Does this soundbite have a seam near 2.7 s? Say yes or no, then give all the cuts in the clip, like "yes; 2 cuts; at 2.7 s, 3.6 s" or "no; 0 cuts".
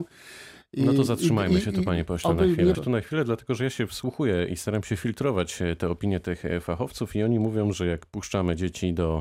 yes; 2 cuts; at 2.7 s, 7.7 s